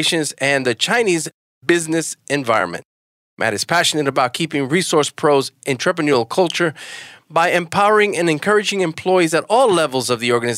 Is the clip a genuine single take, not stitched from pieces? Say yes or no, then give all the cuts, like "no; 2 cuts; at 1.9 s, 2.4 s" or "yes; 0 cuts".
yes; 0 cuts